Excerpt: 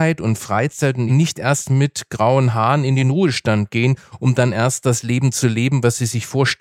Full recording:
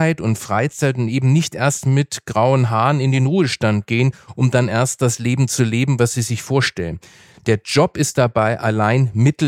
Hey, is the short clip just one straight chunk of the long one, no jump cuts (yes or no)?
no